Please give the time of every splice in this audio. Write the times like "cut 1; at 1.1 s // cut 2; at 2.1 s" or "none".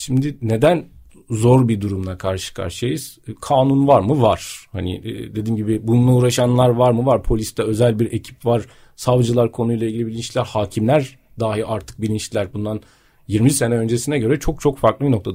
none